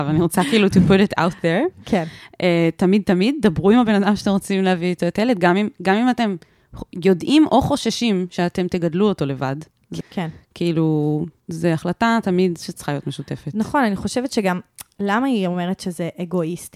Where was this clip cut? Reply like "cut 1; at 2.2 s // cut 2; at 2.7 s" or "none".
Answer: cut 1; at 3.0 s // cut 2; at 10.0 s